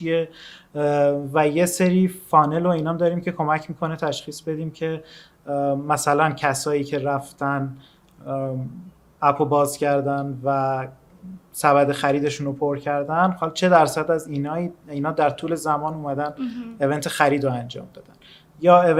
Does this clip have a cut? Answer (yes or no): no